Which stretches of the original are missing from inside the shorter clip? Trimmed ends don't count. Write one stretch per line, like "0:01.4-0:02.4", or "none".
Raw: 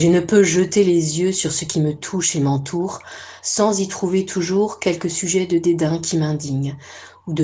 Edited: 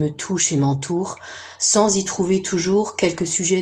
none